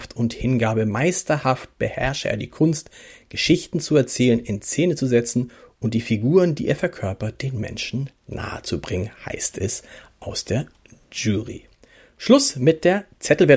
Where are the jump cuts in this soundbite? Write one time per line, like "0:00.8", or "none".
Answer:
none